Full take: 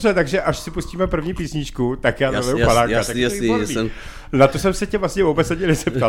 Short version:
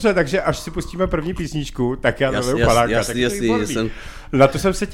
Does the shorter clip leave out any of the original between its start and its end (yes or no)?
no